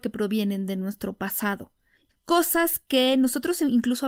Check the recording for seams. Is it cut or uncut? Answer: cut